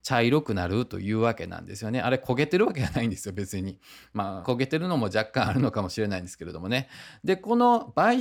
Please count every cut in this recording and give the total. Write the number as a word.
one